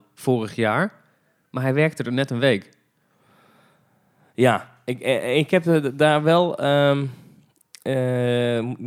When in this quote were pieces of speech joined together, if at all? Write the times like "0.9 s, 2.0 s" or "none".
none

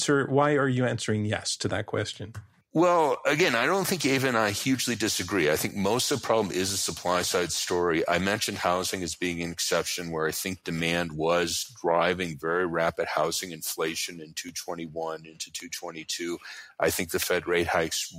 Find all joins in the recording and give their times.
none

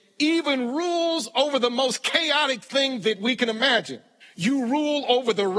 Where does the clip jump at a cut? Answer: 4.2 s

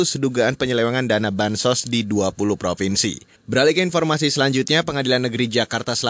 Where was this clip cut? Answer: 3.4 s

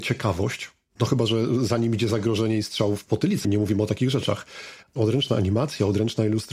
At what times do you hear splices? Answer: 3.4 s, 4.8 s

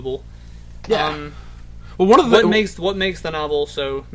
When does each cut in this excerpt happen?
none

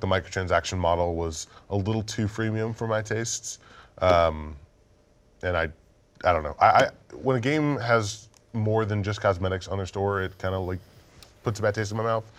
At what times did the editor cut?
none

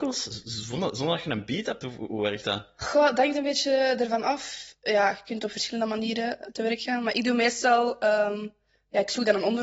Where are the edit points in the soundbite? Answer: none

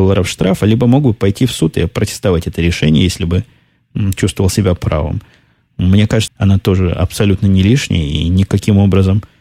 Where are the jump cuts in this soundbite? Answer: 6.3 s

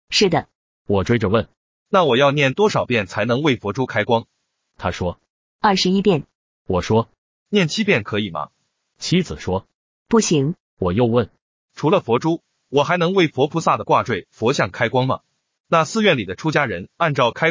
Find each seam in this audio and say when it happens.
10.6 s, 15.6 s

